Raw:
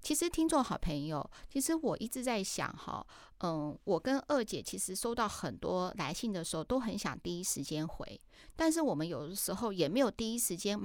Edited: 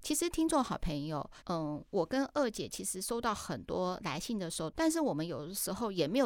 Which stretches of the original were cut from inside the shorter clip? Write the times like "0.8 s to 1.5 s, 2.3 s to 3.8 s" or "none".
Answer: 1.4 s to 3.3 s, 6.7 s to 8.5 s

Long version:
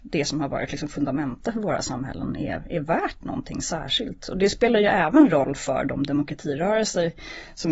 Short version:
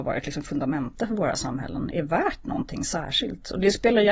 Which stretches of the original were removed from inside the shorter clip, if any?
2.4 s to 2.7 s

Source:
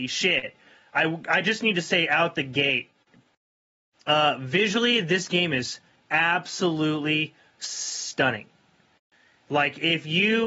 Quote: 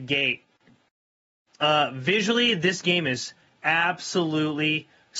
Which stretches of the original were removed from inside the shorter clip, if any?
none

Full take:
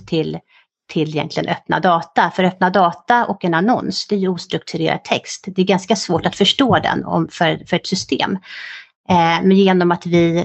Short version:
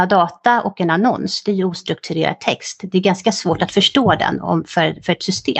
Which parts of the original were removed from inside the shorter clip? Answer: none

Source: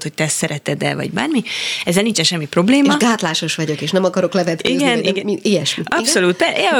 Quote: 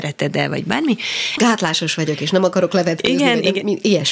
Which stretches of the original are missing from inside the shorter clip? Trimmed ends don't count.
1.8 s to 3.0 s

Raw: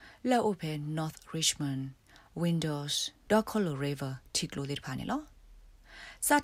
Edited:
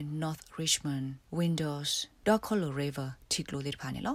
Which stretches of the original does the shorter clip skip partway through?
2.0 s to 2.3 s

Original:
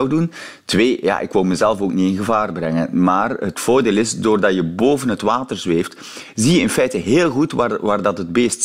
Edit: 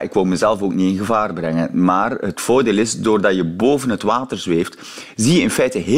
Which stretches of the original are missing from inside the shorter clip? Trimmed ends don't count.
none

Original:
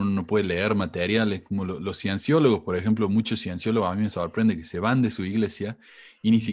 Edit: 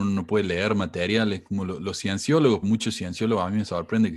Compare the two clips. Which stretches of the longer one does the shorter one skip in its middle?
2.6 s to 3.1 s

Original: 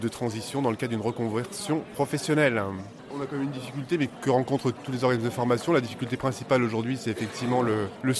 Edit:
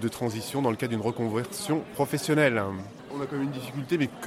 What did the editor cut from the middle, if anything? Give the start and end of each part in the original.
none

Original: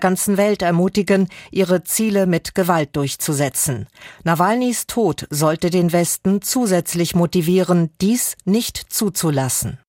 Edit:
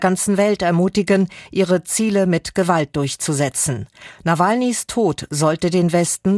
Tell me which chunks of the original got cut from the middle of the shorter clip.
none

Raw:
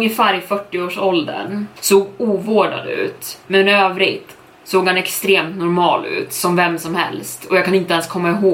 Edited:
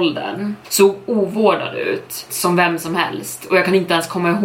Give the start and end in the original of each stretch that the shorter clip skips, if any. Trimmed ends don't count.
3.4 s to 6.3 s

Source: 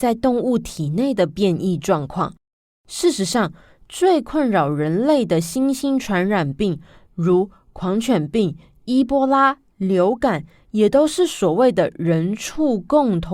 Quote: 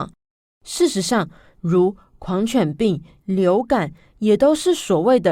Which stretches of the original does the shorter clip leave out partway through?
3.8 s to 7.1 s, 8.7 s to 9.7 s

